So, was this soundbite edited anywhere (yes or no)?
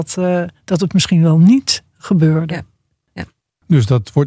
no